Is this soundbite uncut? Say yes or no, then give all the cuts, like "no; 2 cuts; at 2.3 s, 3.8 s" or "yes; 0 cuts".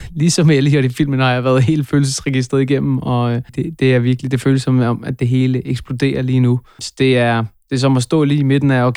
no; 1 cut; at 3.5 s